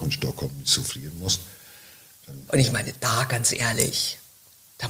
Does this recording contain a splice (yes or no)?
yes